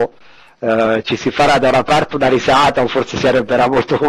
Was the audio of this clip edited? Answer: no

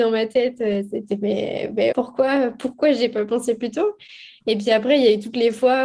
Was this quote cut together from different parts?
yes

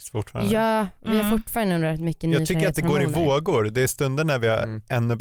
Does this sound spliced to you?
no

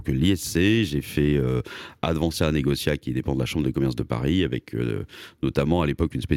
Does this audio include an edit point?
no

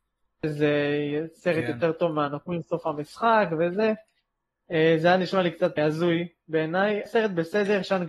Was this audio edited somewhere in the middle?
yes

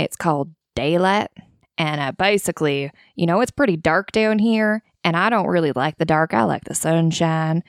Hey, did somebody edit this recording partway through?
no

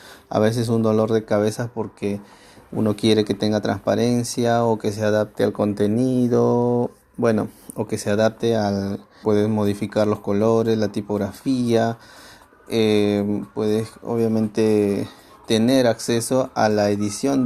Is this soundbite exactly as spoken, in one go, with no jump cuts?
no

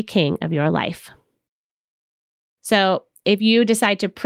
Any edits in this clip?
no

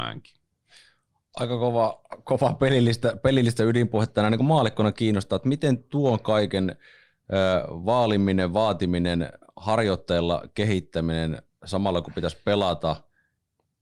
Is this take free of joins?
yes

